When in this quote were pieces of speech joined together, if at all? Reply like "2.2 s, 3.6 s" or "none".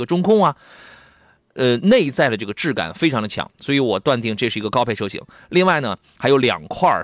none

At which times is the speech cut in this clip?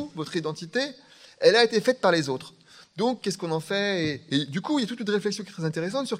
none

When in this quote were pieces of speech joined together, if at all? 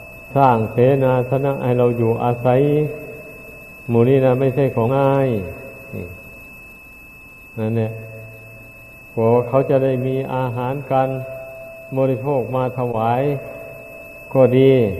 4.9 s

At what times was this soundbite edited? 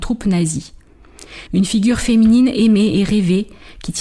1.5 s

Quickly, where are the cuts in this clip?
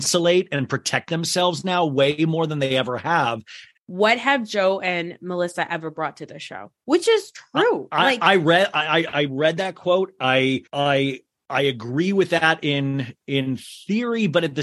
3.8 s, 10.7 s

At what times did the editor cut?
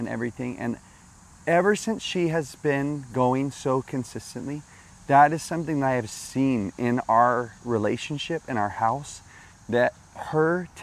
none

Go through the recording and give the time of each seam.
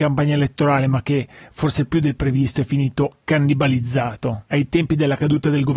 4.5 s

